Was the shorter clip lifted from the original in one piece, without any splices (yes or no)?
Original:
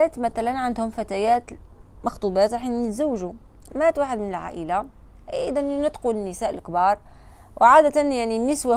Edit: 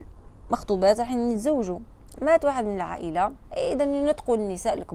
no